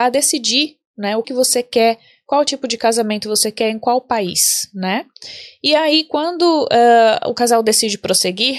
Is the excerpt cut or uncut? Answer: cut